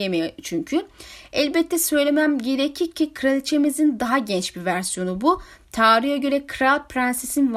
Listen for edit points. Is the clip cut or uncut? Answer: uncut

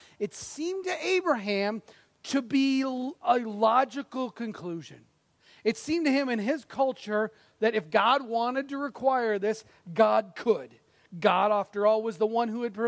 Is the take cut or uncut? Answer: uncut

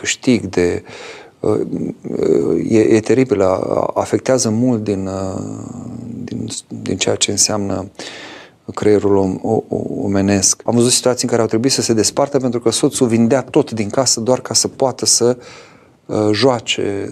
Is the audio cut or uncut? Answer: cut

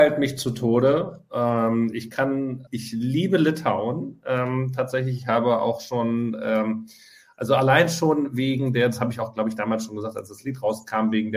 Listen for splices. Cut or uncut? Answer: cut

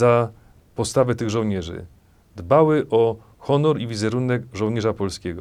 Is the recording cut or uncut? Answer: uncut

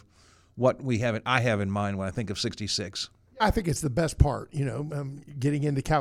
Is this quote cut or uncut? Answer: uncut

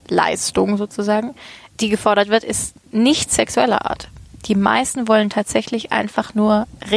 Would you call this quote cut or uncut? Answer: uncut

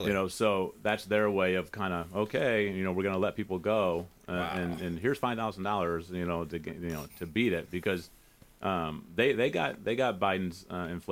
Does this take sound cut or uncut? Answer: cut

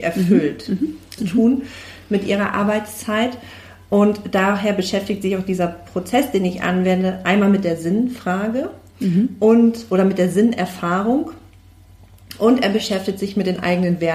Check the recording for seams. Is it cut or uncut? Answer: cut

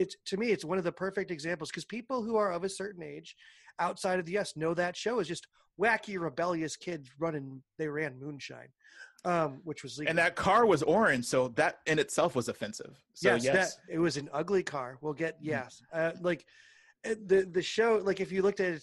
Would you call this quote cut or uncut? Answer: cut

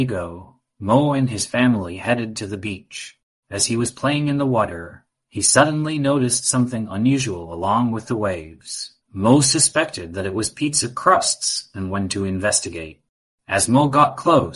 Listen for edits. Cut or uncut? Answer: cut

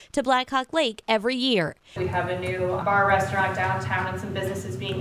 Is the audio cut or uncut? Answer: cut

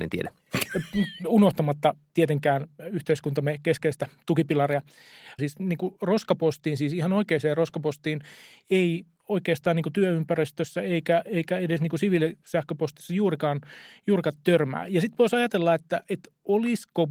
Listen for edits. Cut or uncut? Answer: cut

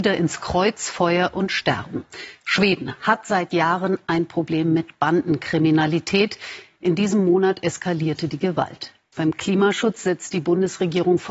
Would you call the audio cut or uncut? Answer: cut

